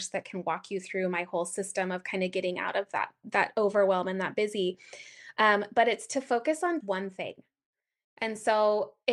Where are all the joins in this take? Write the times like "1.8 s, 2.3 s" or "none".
6.8 s